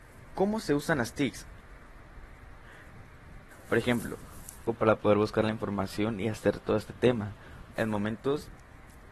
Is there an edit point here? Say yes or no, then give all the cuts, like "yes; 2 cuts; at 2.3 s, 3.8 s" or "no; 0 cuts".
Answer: yes; 3 cuts; at 3.5 s, 4.7 s, 7.7 s